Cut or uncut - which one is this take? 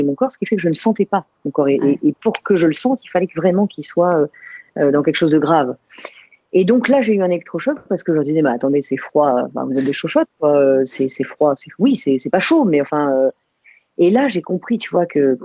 uncut